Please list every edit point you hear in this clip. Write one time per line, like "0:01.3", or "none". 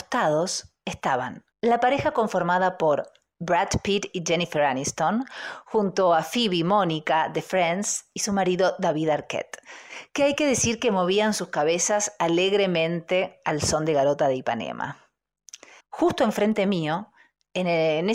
0:01.5
0:15.8